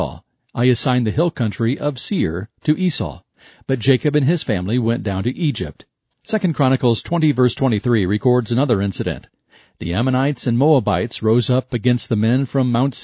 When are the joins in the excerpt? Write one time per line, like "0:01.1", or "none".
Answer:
0:06.0